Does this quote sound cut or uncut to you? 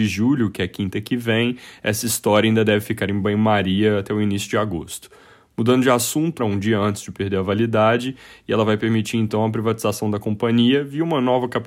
cut